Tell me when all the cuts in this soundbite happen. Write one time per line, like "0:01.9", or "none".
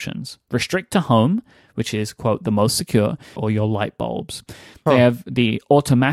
0:03.4
0:04.7